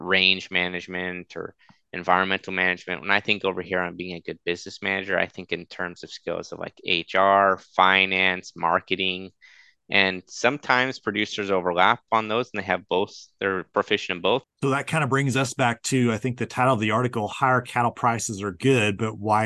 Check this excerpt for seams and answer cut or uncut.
cut